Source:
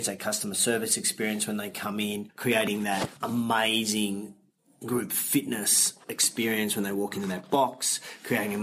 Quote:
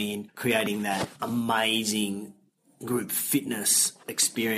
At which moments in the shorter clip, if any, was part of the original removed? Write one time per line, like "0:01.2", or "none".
none